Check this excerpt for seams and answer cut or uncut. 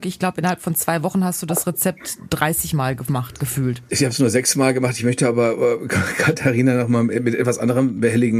uncut